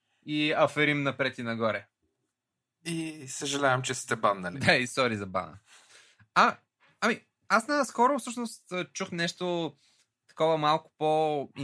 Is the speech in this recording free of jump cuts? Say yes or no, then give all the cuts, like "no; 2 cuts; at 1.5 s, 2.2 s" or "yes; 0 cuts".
yes; 0 cuts